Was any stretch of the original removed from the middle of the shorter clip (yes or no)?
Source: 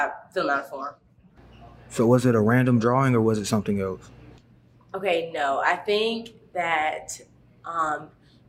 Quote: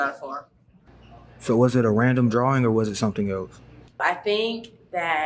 yes